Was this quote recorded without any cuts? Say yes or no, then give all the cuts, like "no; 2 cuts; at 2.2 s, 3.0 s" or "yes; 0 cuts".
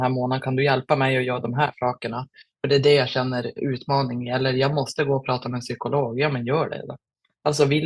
no; 1 cut; at 3.6 s